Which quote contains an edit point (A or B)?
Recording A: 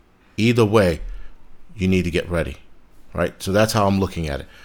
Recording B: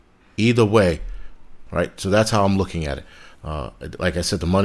B